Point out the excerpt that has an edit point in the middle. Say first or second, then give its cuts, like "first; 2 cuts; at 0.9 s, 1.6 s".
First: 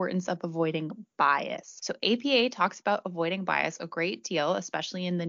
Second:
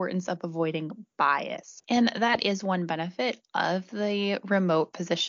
second; 1 cut; at 1.8 s